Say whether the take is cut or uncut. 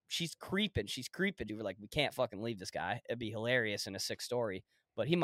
cut